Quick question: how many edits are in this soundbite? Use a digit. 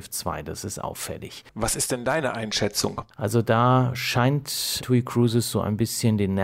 2